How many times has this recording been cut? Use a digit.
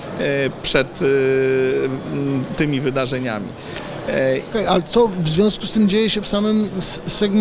1